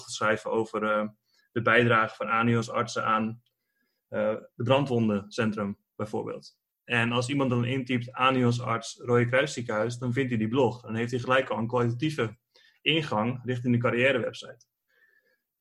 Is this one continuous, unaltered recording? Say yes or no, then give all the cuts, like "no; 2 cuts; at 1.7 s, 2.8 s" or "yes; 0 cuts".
yes; 0 cuts